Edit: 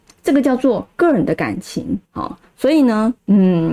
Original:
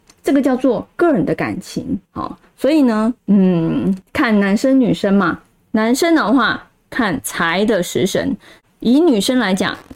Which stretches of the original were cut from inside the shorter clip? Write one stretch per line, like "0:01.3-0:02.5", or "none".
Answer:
none